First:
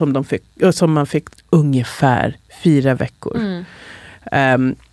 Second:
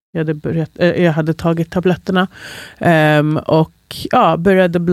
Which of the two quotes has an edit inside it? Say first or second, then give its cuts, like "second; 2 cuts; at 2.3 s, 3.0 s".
first; 1 cut; at 1.3 s